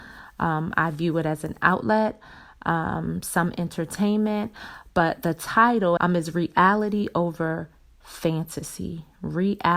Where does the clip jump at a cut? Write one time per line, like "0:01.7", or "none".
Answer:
0:06.0